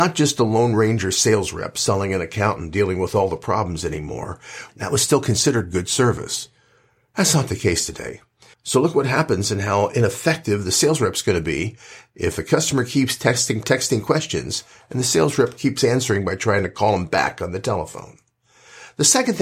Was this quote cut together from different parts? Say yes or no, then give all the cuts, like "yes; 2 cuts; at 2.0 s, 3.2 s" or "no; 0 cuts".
yes; 3 cuts; at 4.7 s, 8.5 s, 13.6 s